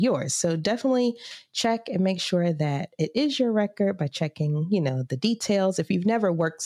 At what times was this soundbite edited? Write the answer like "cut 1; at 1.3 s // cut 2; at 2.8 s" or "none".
none